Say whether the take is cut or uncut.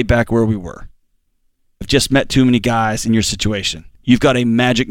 cut